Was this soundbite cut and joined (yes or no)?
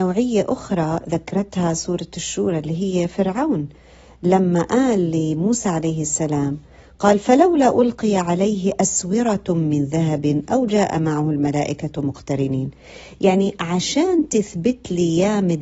no